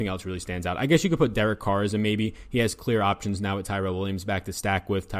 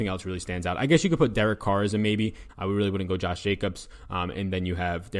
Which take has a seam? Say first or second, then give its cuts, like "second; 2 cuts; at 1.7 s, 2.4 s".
second; 1 cut; at 2.5 s